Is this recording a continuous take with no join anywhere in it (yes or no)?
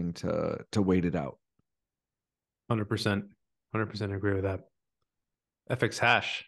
yes